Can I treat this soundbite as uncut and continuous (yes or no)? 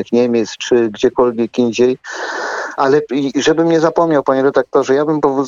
no